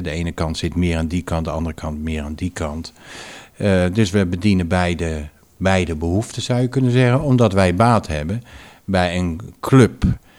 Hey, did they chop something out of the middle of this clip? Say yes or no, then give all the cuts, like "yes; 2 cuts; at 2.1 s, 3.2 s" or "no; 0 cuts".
no; 0 cuts